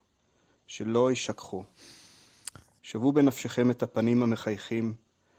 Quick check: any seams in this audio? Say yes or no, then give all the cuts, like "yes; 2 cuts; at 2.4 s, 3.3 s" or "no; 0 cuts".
yes; 1 cut; at 2.8 s